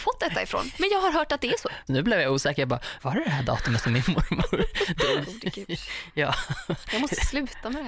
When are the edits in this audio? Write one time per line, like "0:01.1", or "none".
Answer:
0:01.9
0:03.0
0:05.2